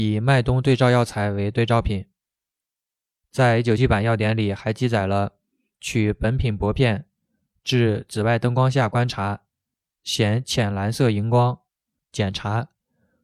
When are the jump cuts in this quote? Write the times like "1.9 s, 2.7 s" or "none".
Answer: 3.8 s, 12.0 s